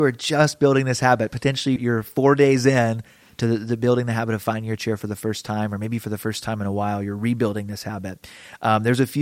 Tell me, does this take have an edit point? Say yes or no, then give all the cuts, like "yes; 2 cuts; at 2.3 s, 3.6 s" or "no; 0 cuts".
yes; 1 cut; at 1.8 s